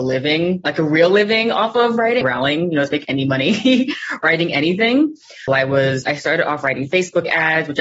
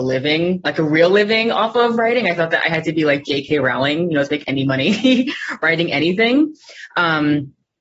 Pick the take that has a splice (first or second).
first